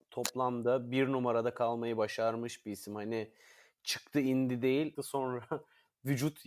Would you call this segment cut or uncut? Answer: cut